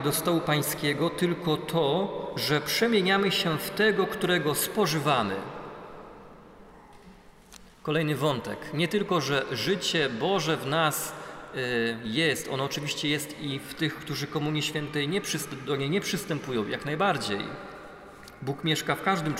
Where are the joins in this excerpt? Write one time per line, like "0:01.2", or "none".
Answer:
none